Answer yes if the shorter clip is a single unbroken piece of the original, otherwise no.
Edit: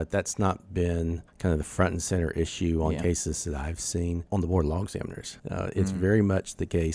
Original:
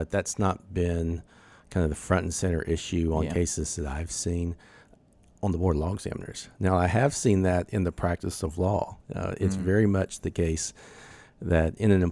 no